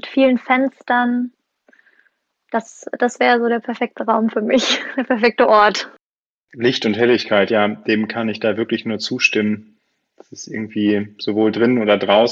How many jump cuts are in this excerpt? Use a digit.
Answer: 0